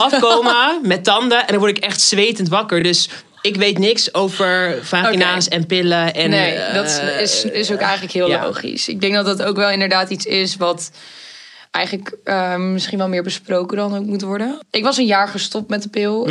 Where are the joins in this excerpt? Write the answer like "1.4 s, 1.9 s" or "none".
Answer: none